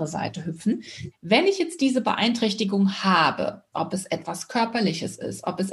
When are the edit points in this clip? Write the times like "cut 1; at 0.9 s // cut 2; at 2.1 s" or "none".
cut 1; at 1.1 s // cut 2; at 3.7 s